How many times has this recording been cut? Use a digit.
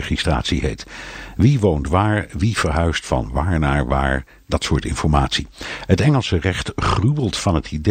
0